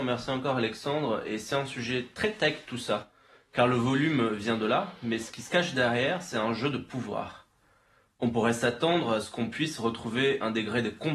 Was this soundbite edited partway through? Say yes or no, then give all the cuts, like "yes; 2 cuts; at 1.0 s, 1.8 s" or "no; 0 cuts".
no; 0 cuts